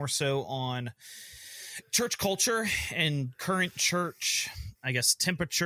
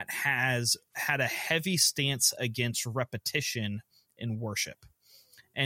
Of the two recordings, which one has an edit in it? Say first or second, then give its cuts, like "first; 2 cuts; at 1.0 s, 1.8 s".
first; 1 cut; at 4.7 s